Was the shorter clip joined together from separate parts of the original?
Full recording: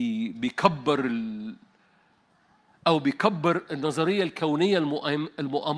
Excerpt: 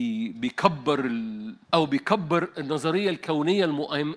yes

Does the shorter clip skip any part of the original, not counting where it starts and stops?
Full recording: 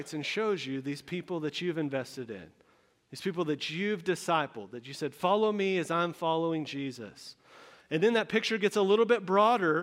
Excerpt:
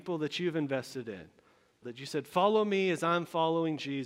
yes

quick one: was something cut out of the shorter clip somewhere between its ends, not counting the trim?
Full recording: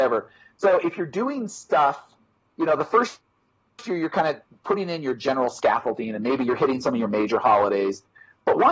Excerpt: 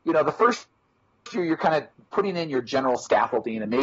no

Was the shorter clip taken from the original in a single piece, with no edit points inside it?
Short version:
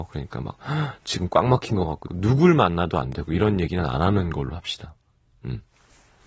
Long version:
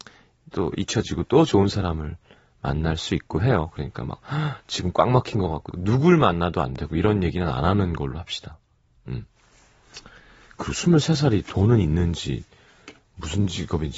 yes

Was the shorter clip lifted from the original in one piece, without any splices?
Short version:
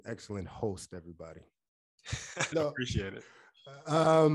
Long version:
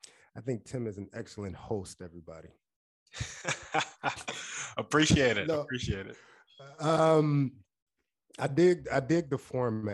no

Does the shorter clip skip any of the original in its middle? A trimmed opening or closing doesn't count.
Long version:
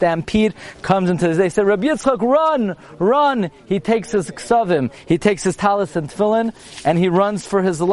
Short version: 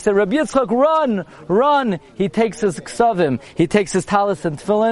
no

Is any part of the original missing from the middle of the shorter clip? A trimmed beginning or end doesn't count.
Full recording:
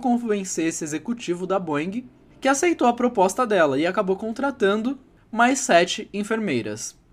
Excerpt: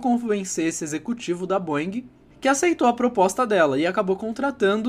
no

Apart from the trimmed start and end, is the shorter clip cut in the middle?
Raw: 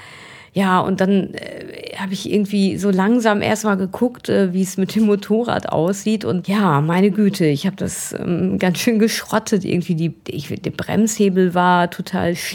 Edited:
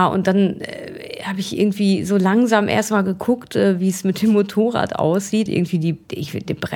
yes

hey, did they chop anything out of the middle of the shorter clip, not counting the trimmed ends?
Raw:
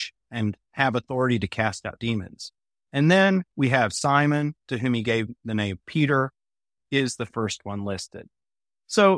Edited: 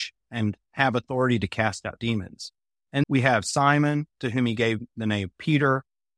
yes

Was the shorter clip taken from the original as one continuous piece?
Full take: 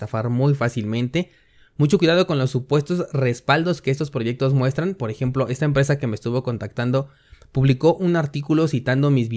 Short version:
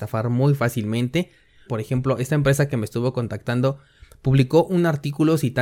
no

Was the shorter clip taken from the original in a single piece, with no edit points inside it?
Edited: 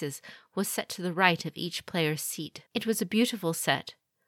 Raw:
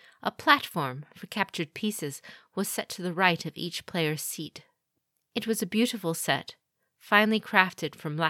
no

